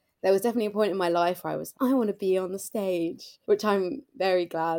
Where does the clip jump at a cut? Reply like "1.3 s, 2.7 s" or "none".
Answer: 1.7 s, 3.4 s